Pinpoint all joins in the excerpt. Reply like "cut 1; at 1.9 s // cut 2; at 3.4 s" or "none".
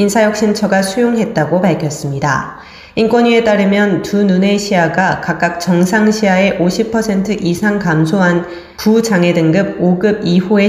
none

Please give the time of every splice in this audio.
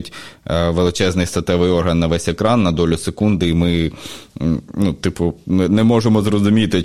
none

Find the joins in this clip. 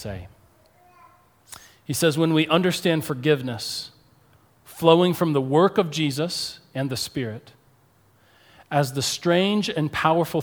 none

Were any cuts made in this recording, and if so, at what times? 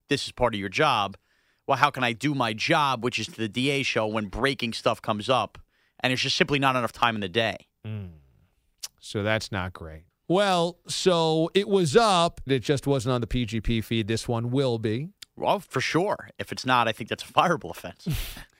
cut 1; at 10.1 s // cut 2; at 12.5 s

